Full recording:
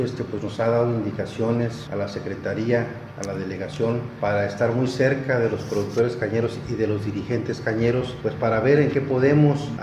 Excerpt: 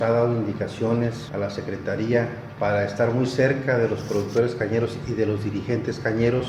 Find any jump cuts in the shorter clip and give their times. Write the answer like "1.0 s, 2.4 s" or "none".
2.6 s